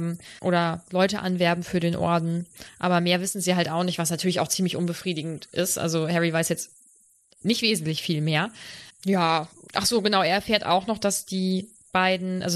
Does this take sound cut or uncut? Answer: uncut